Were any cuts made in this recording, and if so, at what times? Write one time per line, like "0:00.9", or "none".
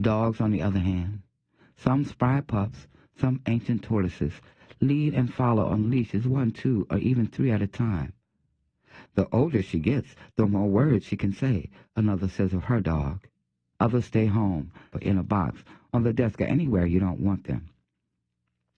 0:09.1
0:13.7
0:14.9